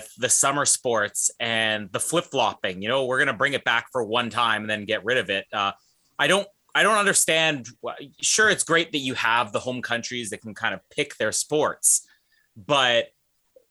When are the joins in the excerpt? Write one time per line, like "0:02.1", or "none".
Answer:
none